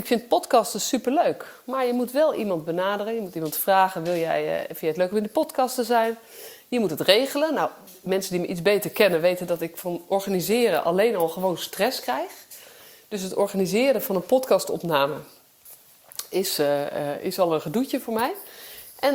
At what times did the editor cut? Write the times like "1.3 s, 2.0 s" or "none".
none